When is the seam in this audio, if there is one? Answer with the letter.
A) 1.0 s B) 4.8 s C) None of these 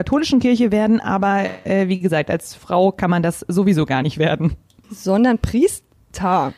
B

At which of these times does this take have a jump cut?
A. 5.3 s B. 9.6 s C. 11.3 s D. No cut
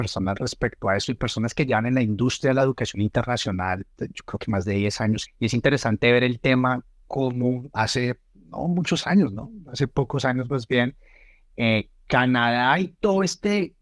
A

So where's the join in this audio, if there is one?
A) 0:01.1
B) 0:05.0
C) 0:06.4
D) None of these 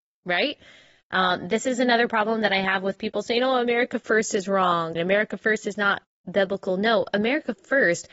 B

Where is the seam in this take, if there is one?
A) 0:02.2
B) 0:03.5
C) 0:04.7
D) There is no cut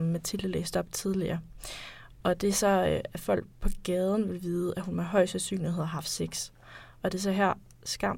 B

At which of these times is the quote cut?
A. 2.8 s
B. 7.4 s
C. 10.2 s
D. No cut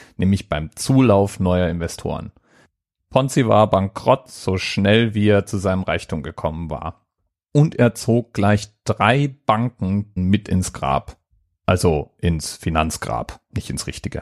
C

